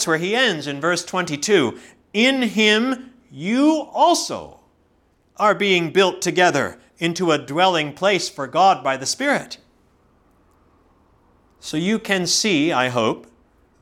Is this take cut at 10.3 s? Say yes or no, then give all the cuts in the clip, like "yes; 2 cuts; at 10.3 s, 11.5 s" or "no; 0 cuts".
no; 0 cuts